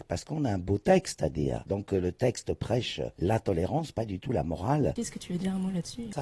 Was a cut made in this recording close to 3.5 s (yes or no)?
no